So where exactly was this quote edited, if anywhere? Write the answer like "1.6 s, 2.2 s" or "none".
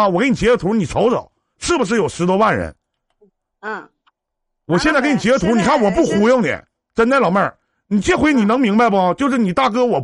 3.6 s